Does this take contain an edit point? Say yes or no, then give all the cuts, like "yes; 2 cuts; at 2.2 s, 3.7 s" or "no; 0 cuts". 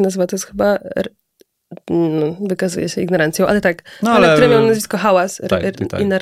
no; 0 cuts